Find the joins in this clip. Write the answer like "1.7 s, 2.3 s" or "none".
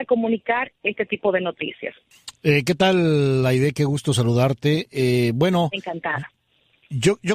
none

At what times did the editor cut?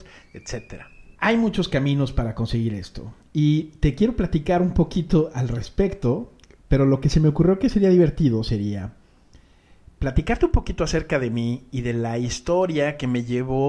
1.2 s

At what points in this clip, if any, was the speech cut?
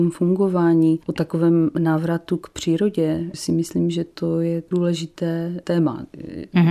none

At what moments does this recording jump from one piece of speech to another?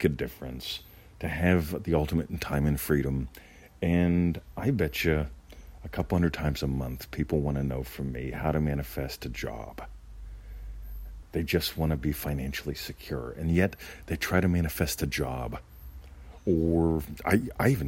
11.2 s

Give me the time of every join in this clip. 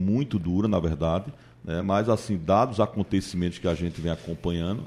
none

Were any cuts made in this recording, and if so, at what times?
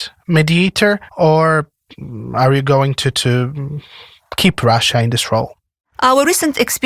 1.1 s

